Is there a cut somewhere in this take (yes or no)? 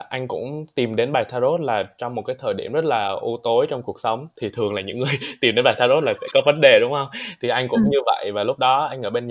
no